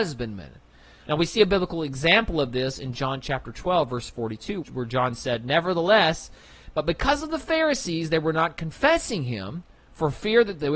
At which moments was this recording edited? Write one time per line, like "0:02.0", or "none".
0:01.1
0:04.6
0:06.7